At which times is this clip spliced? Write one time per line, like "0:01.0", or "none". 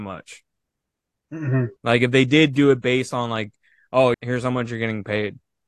0:01.8
0:04.1